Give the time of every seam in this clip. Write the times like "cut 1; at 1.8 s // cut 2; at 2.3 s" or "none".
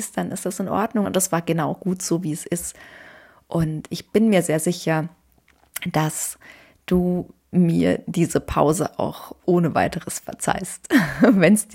cut 1; at 1.0 s

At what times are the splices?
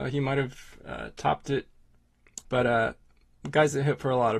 cut 1; at 2.4 s

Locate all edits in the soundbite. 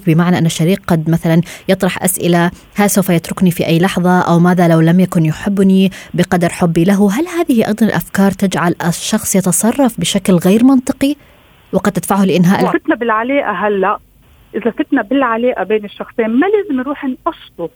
cut 1; at 12.7 s

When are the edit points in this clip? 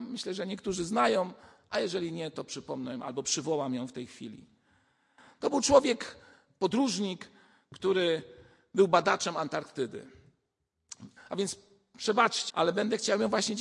cut 1; at 11.2 s // cut 2; at 12.5 s

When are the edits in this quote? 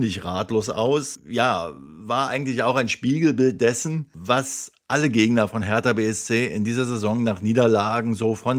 none

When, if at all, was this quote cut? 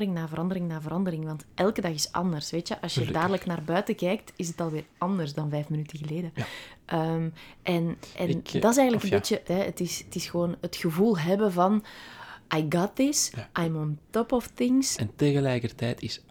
cut 1; at 9.5 s // cut 2; at 15.0 s

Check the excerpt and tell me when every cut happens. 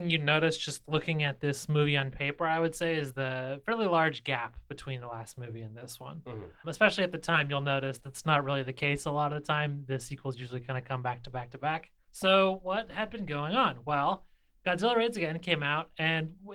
cut 1; at 8.0 s

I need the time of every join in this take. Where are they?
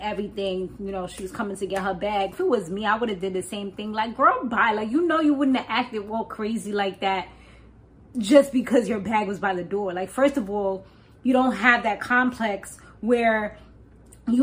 cut 1; at 2.3 s

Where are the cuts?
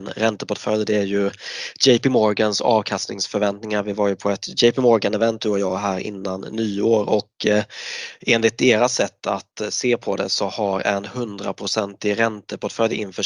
none

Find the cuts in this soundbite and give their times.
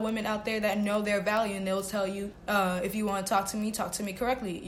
cut 1; at 2.3 s

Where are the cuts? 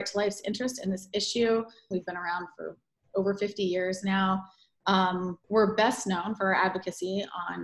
cut 1; at 1.9 s // cut 2; at 5.4 s

